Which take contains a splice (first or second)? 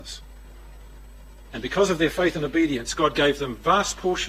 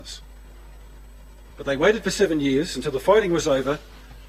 first